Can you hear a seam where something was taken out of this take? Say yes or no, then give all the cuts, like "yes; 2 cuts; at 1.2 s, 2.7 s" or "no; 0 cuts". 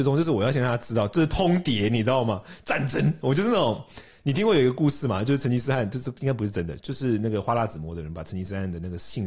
no; 0 cuts